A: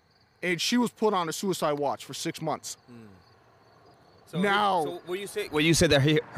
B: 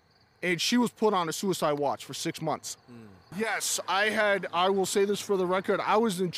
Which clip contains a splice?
B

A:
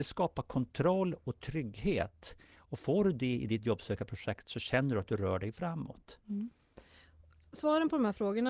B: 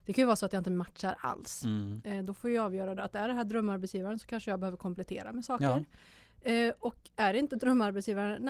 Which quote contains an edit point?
B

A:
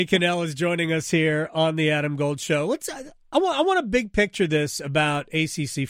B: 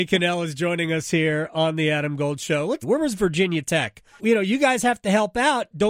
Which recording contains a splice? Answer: B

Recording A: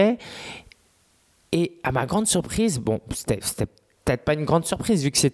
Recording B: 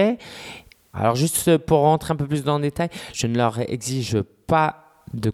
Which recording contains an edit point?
B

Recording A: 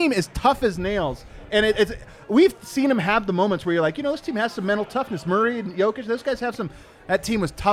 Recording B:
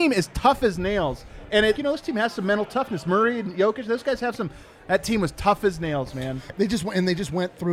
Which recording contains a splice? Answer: B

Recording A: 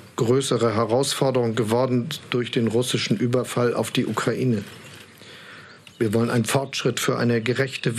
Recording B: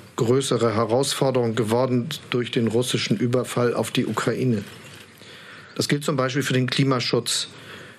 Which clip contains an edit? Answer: B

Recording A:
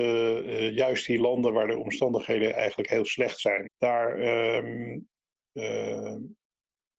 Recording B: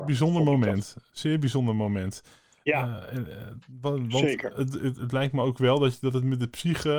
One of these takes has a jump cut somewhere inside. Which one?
A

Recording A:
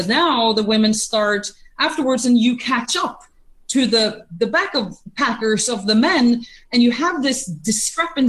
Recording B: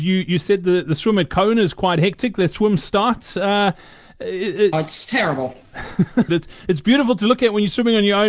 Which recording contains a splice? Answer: B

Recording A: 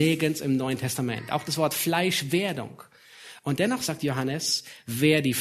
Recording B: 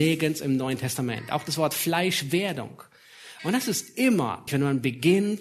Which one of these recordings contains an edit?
B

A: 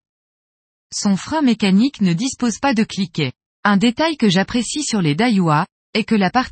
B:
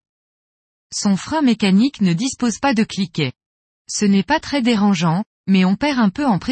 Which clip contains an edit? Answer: A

